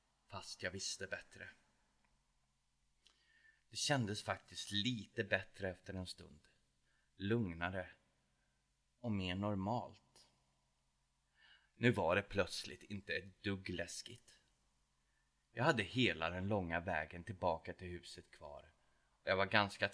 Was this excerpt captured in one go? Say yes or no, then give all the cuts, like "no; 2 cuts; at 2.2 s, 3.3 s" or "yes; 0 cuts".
no; 1 cut; at 11.6 s